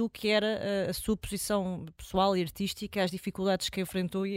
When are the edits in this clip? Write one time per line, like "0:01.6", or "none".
none